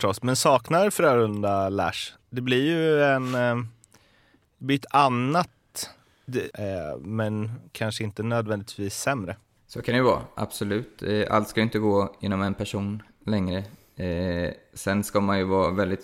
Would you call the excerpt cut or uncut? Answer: cut